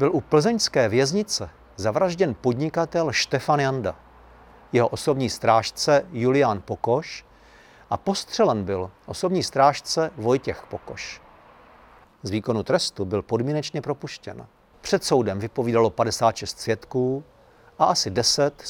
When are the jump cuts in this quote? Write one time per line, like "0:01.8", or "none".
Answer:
0:12.0
0:14.7